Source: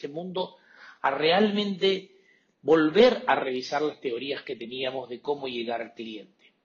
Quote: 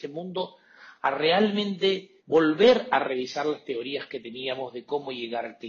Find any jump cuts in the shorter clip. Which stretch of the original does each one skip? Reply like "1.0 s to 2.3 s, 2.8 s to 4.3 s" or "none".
2.2 s to 2.5 s